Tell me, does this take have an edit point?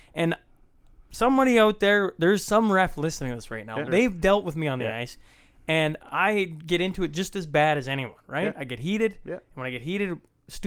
yes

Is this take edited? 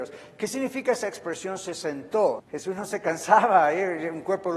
yes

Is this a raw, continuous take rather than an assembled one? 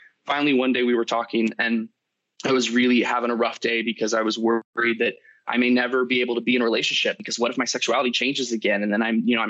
yes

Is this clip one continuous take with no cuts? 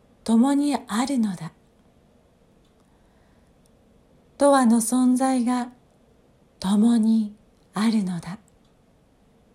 yes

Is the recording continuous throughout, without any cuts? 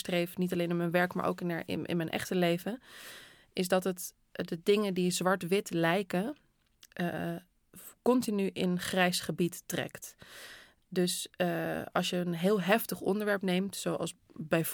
yes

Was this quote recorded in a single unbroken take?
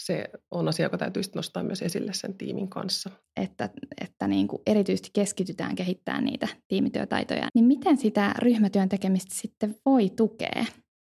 no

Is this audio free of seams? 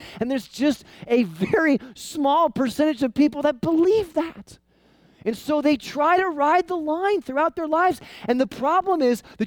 yes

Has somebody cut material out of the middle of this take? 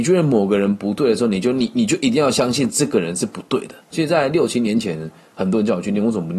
yes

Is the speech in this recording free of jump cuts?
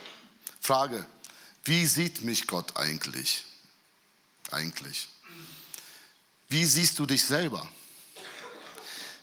yes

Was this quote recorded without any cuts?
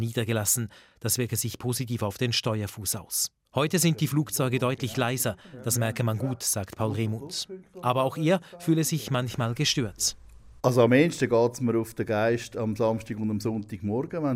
no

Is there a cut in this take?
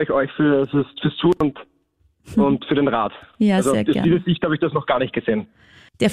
no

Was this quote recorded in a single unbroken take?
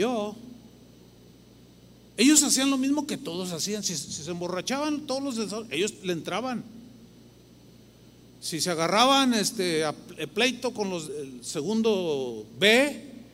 no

